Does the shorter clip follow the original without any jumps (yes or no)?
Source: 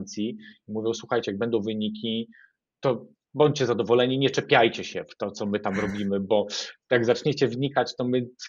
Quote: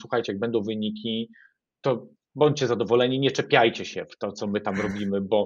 yes